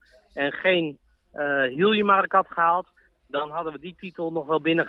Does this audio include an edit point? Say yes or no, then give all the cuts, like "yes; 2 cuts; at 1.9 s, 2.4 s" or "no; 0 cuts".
no; 0 cuts